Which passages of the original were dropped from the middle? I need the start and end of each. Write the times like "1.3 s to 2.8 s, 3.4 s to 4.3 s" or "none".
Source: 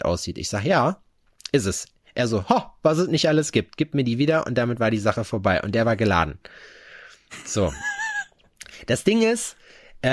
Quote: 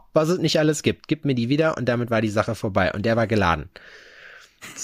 none